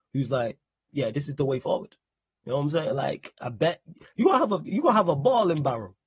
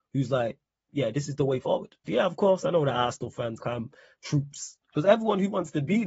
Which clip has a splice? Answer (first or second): second